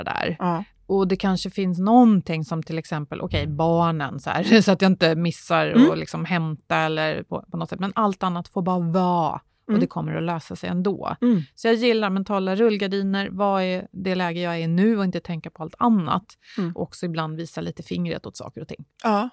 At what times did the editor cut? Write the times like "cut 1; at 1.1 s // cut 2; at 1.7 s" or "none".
none